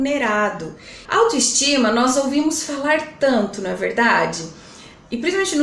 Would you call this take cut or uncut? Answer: cut